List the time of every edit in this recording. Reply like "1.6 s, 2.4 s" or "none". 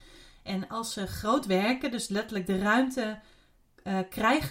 none